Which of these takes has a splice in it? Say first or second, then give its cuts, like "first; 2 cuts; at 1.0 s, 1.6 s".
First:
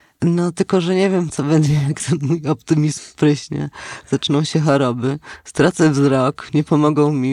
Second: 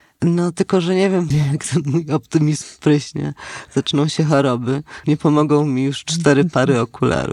second; 2 cuts; at 1.3 s, 5.0 s